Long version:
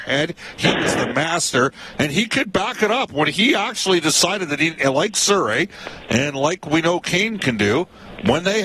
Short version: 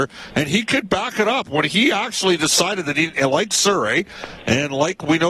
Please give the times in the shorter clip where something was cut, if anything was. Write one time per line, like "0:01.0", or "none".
none